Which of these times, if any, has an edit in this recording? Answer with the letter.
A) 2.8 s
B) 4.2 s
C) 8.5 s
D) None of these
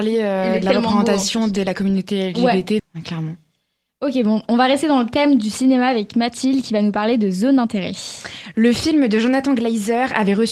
A